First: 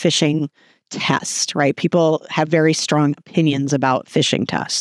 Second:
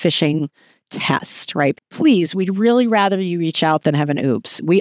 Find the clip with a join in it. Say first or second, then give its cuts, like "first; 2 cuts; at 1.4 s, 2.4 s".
second; 1 cut; at 1.7 s